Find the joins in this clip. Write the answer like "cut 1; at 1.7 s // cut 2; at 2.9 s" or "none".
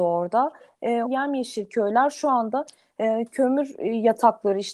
cut 1; at 1.0 s